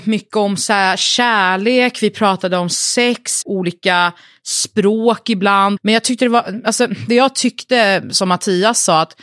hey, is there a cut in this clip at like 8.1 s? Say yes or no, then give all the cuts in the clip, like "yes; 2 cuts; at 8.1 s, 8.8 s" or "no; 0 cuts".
no; 2 cuts; at 3.4 s, 5.8 s